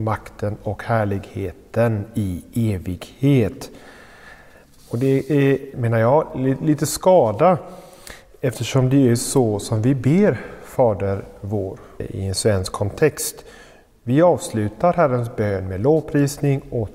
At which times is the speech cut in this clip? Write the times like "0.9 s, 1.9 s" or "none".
5.7 s, 12.0 s